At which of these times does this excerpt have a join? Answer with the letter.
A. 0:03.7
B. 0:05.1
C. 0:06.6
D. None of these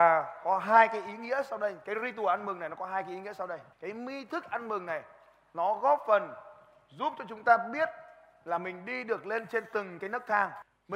A